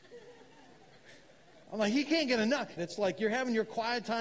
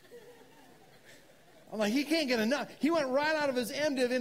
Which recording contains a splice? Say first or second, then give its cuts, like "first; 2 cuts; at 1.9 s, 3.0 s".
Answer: first; 1 cut; at 2.8 s